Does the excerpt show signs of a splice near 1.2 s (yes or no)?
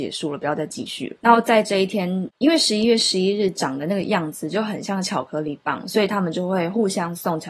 yes